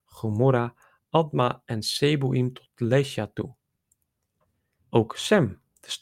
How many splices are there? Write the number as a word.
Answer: one